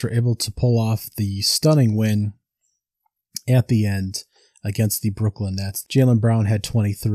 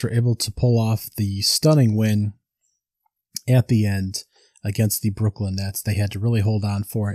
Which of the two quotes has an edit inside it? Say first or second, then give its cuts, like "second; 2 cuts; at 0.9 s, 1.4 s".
first; 1 cut; at 5.8 s